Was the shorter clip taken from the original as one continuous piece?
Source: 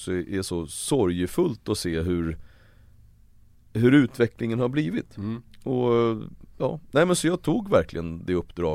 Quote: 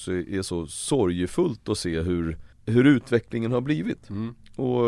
no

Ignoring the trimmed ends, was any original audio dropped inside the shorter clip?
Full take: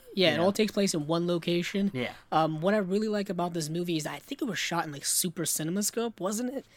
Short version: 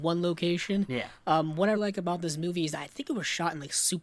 yes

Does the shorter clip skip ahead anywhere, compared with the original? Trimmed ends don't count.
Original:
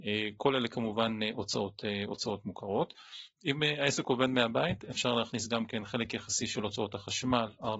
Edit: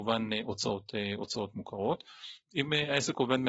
no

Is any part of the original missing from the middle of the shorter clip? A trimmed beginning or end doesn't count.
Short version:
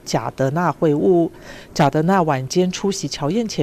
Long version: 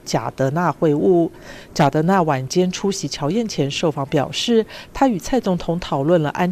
no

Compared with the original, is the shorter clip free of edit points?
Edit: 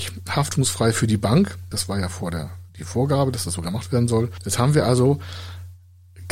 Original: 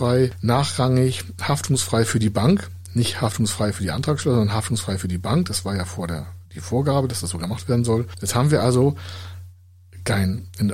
no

